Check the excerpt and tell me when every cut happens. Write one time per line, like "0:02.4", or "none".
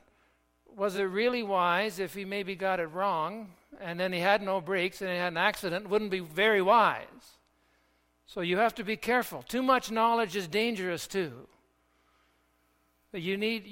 none